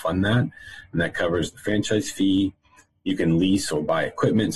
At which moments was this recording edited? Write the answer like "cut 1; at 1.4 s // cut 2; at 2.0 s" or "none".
none